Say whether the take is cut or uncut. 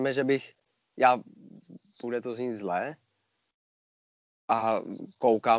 uncut